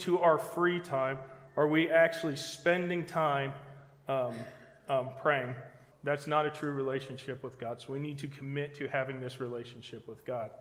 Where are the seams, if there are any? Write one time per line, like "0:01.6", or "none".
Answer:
0:05.9